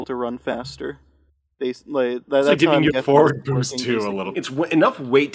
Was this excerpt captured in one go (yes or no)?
no